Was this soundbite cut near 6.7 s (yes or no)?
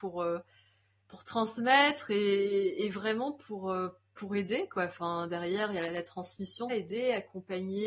yes